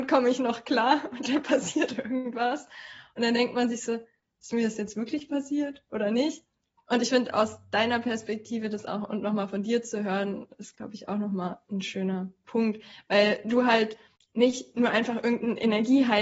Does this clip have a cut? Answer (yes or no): no